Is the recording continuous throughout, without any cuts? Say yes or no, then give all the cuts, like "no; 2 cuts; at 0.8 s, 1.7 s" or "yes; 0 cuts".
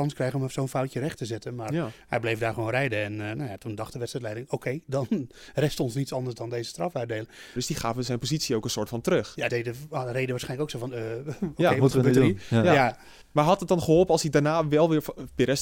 no; 2 cuts; at 7.6 s, 9.5 s